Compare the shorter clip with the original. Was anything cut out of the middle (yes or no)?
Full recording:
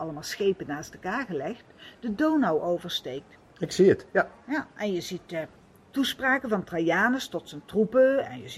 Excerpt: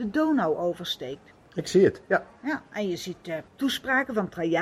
yes